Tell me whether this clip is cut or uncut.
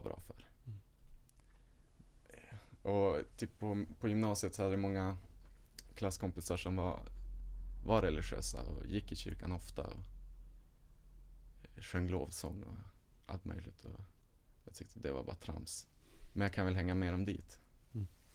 uncut